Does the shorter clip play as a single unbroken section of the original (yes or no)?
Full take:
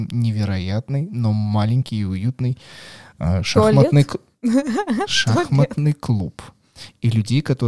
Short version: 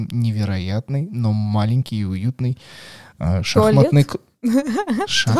yes